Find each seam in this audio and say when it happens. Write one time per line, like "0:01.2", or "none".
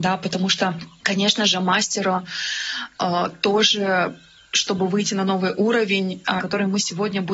0:01.0
0:06.4